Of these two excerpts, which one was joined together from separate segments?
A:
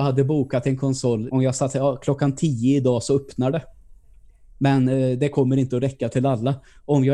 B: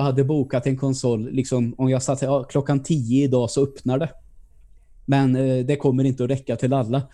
A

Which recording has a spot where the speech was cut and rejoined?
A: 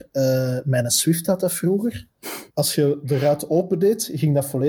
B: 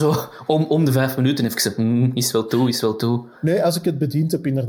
A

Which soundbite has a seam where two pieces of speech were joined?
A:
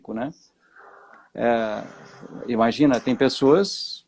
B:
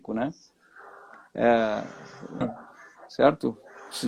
B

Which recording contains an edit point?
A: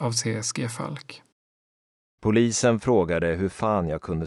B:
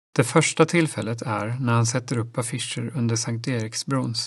A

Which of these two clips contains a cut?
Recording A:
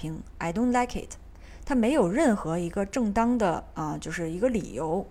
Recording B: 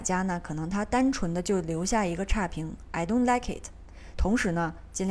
B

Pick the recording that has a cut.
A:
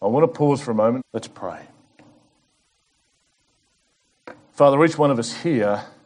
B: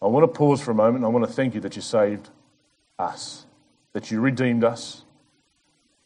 A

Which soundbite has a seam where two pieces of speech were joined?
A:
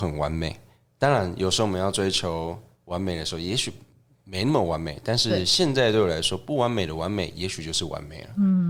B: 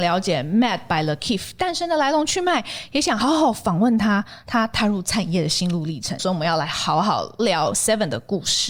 B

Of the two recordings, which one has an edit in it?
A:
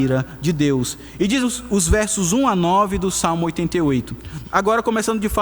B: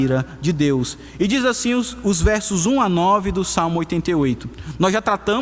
A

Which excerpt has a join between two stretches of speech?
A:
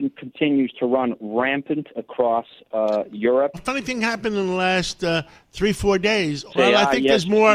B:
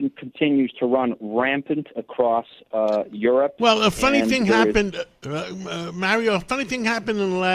A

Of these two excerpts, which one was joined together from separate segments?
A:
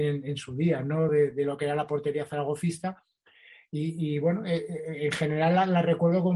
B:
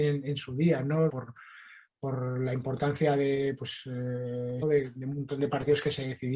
B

